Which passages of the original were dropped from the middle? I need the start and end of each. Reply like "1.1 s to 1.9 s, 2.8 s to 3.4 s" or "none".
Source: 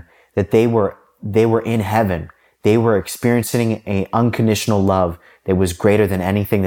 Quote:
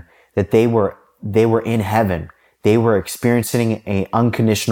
none